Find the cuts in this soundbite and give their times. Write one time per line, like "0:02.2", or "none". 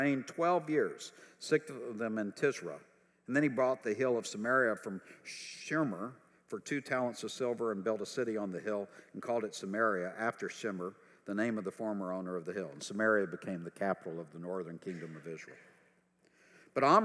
none

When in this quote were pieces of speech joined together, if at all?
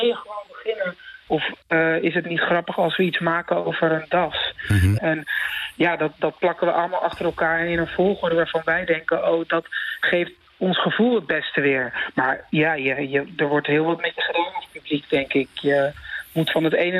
0:01.3
0:05.0

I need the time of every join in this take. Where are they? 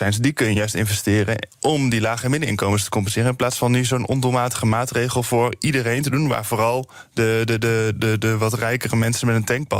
none

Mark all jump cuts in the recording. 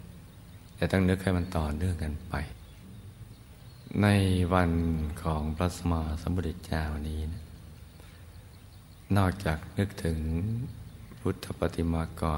0:05.8

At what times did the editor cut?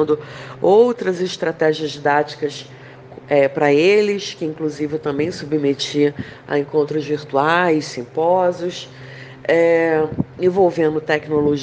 none

